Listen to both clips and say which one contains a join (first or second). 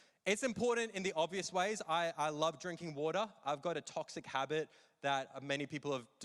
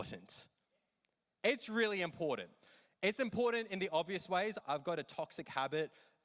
second